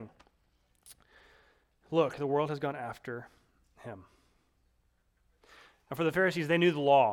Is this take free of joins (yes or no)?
yes